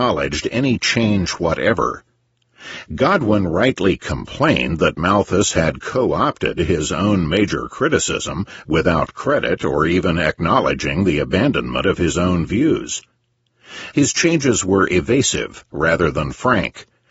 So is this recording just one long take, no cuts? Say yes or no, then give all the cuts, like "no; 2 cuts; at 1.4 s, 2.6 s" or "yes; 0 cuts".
no; 1 cut; at 13.9 s